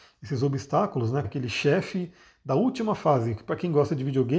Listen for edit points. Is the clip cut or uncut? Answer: cut